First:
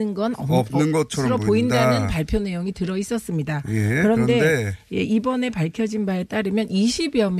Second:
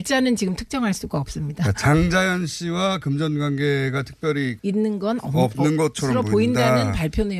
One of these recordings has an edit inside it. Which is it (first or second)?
second